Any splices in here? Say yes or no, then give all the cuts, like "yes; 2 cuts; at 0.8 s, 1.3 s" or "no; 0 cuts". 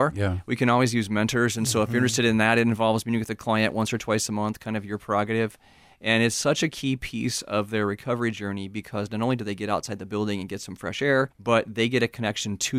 yes; 1 cut; at 11.3 s